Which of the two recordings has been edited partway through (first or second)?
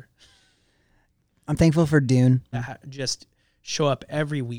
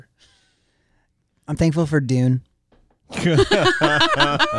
first